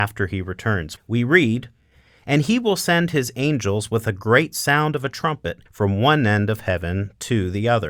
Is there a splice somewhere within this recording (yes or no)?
yes